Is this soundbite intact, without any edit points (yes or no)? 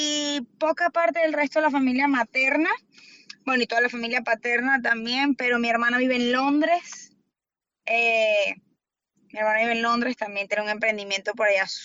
yes